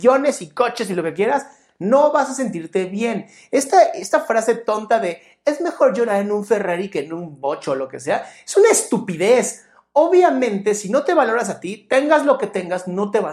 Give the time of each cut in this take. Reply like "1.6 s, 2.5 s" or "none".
none